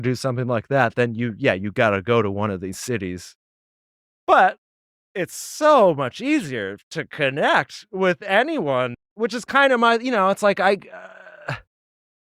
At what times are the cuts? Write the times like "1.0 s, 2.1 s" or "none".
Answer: 8.9 s